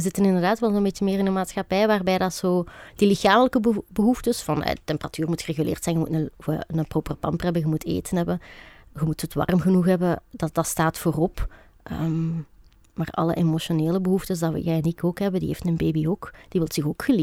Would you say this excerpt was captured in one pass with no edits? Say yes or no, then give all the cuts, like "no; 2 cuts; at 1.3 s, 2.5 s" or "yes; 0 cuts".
yes; 0 cuts